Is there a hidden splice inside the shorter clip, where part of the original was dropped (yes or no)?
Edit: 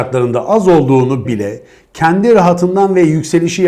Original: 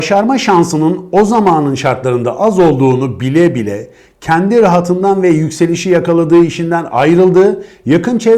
yes